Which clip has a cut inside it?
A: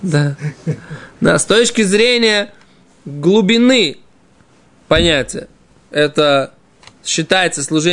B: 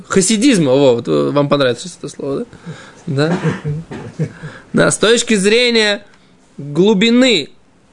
B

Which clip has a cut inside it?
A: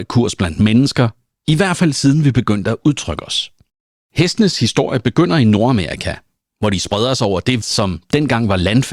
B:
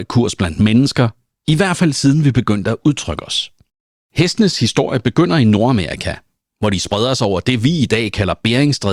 A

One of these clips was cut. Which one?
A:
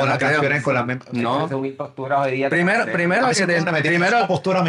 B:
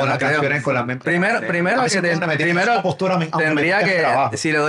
B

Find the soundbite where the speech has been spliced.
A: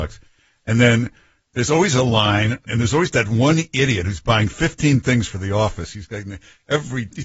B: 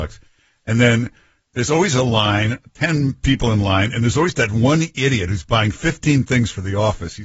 A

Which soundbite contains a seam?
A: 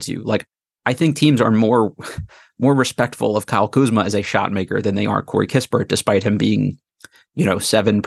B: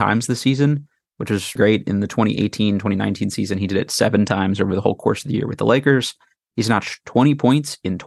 B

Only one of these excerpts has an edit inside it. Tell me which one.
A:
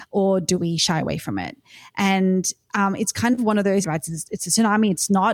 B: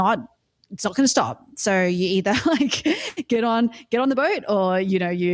A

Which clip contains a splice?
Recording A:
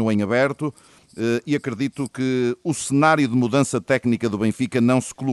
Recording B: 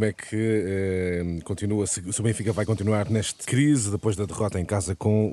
B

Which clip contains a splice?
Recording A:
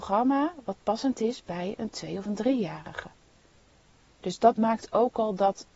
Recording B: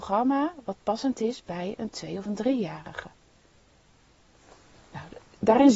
A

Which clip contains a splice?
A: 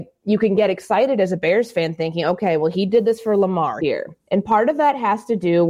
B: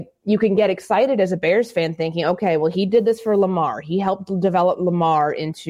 A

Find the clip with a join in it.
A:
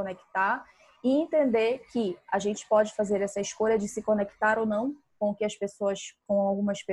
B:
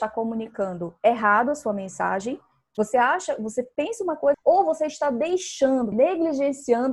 B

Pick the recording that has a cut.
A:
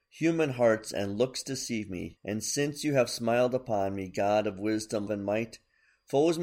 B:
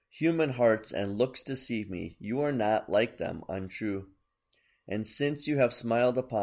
A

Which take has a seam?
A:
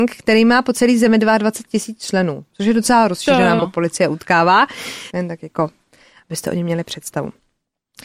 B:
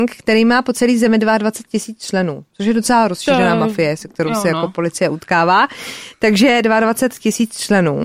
A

